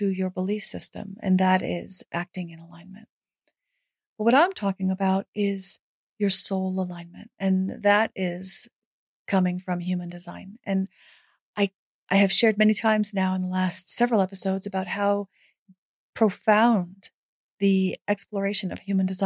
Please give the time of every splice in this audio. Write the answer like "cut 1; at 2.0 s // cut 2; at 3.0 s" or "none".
none